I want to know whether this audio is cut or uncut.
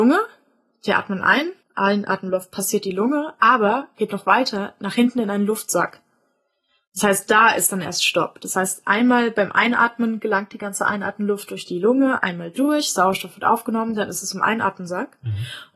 cut